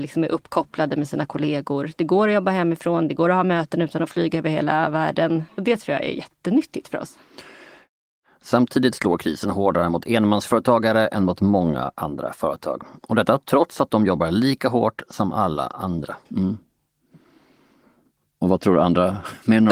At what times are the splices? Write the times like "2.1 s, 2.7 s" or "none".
5.5 s, 16.3 s